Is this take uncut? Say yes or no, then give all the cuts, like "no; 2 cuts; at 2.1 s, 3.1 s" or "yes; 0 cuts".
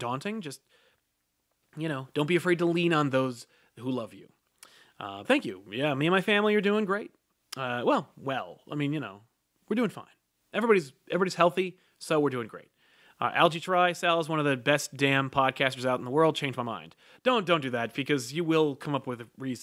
no; 1 cut; at 5.2 s